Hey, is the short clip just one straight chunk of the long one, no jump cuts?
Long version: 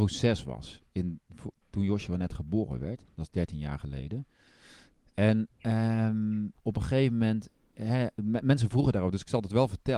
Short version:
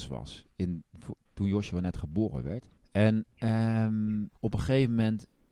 no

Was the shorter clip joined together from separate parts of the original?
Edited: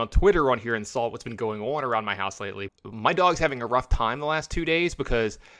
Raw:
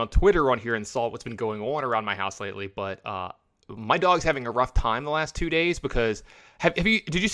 yes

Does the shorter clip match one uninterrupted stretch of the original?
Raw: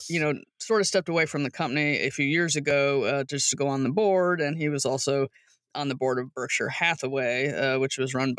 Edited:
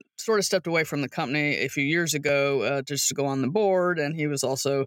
yes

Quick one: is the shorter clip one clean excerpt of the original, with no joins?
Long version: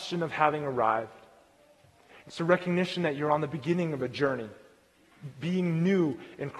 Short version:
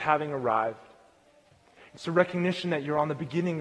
yes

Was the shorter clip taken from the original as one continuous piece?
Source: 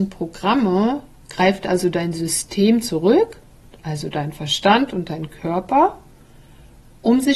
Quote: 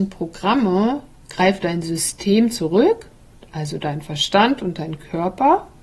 no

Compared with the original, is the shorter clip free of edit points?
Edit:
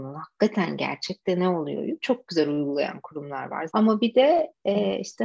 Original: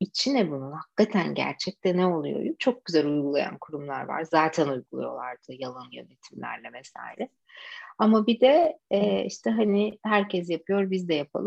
no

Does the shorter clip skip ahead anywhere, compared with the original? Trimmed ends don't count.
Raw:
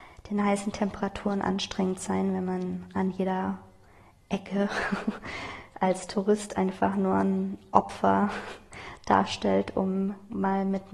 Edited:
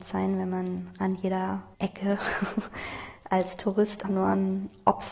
yes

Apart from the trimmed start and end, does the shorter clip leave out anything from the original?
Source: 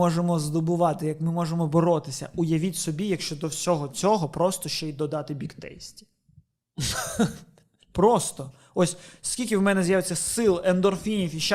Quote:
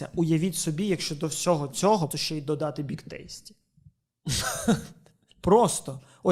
yes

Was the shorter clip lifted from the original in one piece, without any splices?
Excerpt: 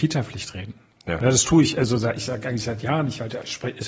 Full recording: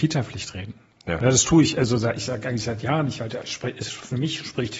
yes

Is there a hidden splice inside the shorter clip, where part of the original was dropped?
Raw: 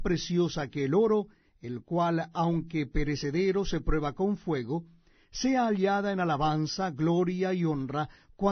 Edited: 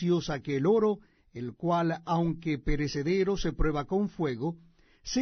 no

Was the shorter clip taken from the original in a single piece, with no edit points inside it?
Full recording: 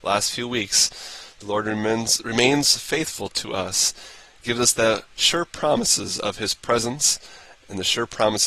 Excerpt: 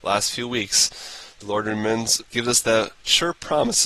no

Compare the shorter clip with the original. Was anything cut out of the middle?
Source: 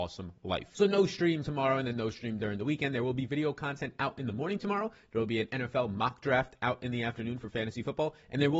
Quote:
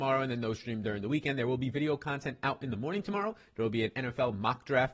no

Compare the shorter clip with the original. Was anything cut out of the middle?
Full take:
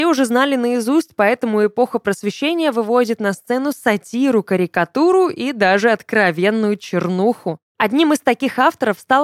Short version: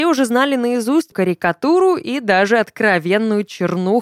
yes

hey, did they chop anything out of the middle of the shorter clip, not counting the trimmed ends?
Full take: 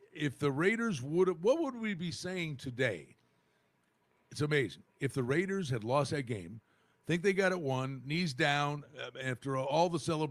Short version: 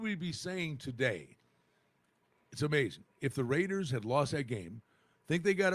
no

